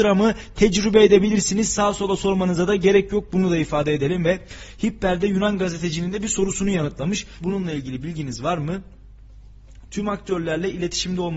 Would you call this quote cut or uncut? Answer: cut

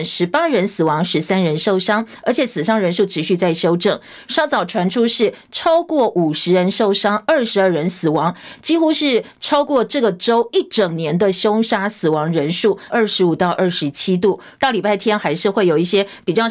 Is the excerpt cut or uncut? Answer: cut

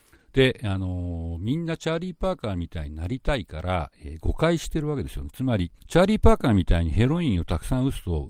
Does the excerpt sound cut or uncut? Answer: cut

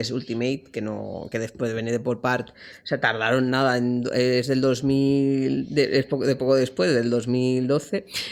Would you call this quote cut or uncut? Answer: uncut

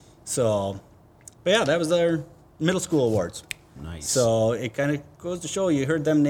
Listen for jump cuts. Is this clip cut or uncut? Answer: cut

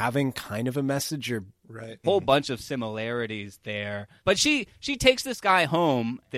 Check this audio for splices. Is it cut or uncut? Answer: cut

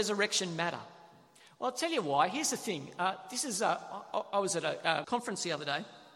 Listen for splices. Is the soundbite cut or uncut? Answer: cut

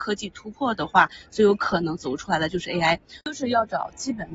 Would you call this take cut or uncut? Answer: cut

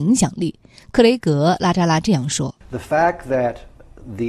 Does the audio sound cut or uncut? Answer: cut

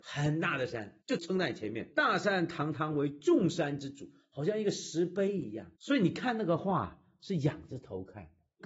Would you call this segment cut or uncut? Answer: cut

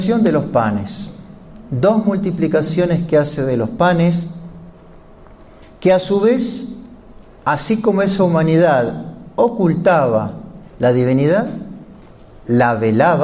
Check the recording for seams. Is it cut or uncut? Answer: uncut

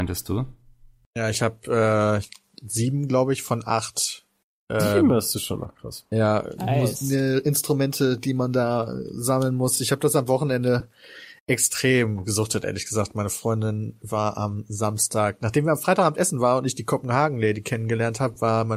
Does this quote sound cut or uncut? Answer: uncut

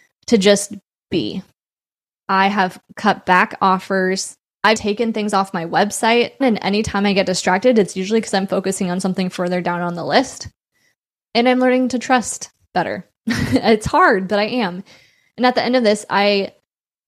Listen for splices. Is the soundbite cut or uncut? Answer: cut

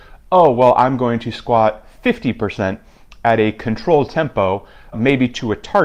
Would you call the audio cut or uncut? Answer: cut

